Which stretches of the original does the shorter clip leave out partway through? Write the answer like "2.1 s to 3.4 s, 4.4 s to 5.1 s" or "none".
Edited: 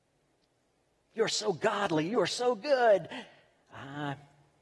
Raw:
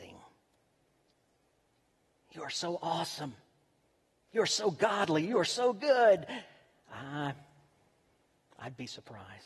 1.7 s to 4.2 s